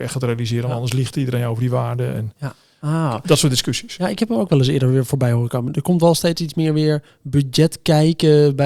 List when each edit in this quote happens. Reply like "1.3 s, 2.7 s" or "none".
2.4 s